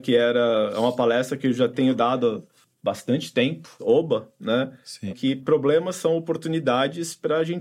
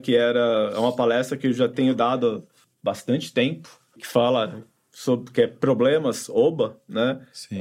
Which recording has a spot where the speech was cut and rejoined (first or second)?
first